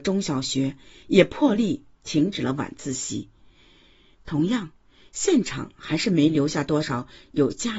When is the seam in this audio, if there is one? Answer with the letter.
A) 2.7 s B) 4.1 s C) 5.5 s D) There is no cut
B